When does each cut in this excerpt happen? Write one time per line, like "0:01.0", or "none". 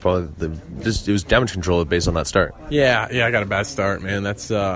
0:01.2